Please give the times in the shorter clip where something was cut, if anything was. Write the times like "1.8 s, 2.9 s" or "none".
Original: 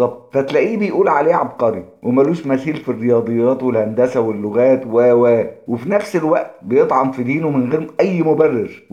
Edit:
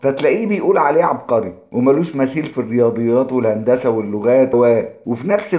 4.5 s